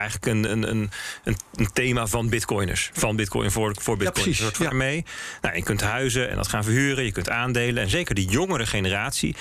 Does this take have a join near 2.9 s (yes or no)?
no